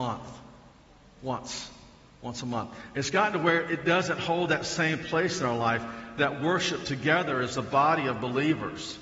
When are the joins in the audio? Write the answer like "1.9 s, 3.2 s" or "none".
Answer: none

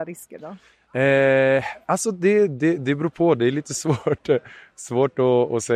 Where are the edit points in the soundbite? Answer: none

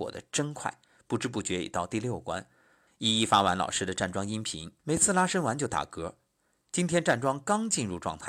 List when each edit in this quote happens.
2.9 s, 4.8 s

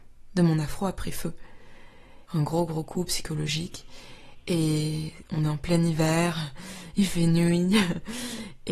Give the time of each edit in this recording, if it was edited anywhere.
2.3 s

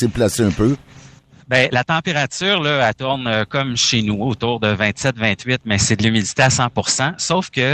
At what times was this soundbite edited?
none

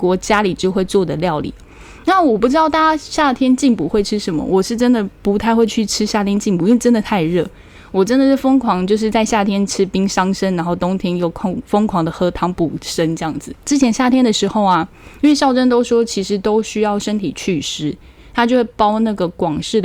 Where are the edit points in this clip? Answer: none

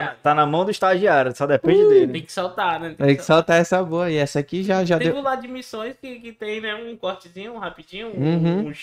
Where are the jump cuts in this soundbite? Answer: none

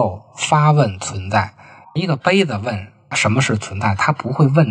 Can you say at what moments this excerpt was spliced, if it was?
1.8 s

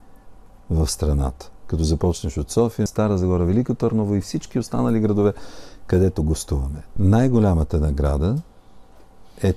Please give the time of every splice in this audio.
2.9 s, 7.0 s

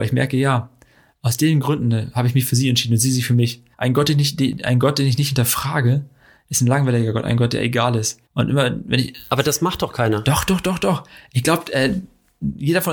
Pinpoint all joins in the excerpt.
3.7 s, 8.3 s

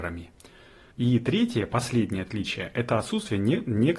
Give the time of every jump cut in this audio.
0.9 s

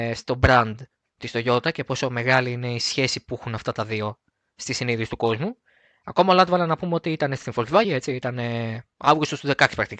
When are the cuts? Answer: 7.8 s

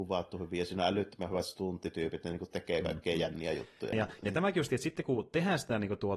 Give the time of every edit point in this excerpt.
3.9 s

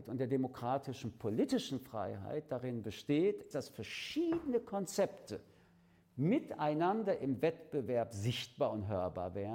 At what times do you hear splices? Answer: 3.5 s

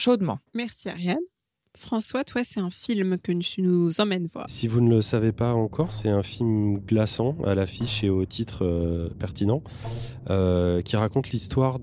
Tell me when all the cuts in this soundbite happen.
4.4 s

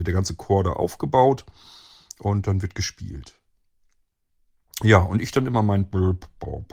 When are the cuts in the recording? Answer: none

